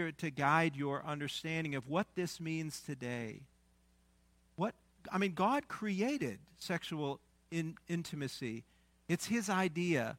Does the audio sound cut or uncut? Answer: uncut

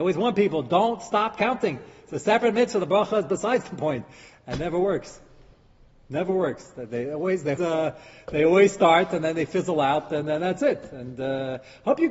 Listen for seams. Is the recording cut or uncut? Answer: cut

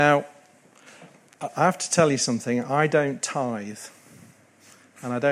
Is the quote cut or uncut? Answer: uncut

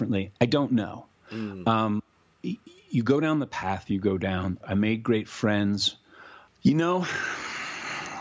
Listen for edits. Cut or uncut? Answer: cut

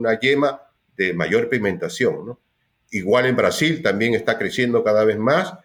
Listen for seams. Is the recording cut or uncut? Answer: uncut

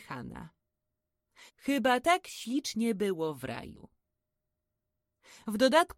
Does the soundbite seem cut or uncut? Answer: cut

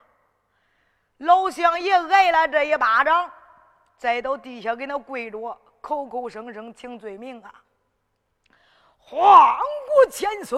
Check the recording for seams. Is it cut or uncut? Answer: uncut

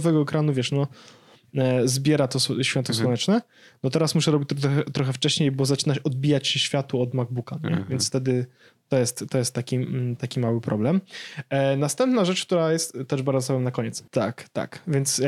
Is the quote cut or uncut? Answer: cut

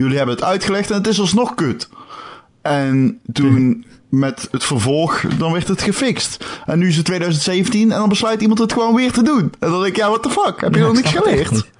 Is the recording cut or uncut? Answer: uncut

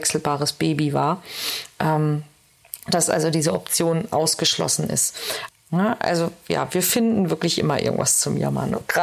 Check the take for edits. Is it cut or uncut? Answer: cut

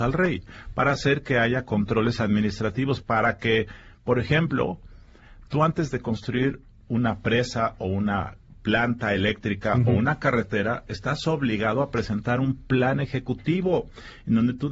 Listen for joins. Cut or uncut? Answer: cut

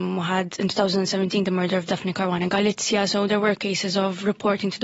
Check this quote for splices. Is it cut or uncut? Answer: uncut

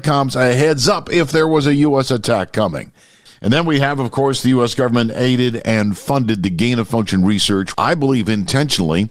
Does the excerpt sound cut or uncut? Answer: cut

